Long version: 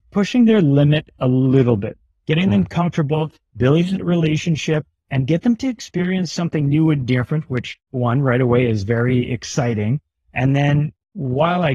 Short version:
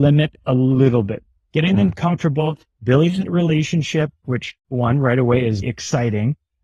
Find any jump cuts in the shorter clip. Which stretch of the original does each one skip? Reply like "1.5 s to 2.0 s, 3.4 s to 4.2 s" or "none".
5.0 s to 7.5 s, 8.8 s to 9.3 s